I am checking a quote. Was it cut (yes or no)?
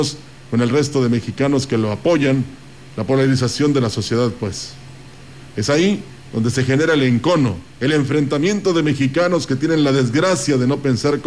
yes